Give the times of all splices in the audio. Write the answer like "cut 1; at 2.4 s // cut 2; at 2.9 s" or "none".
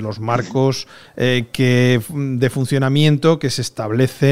none